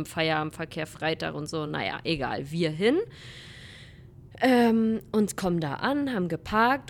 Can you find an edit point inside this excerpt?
no; 0 cuts

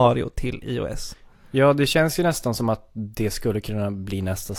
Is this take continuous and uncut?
yes; 0 cuts

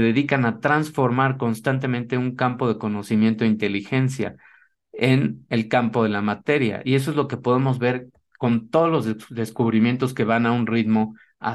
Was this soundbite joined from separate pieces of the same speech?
no; 0 cuts

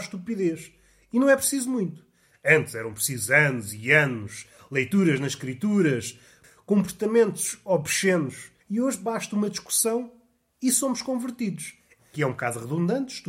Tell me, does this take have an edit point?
yes; 2 cuts; at 8.6 s, 12.0 s

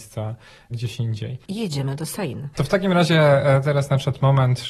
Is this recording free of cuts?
no; 1 cut; at 1.5 s

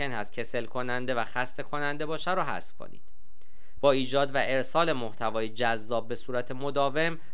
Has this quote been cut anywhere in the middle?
yes; 1 cut; at 3.8 s

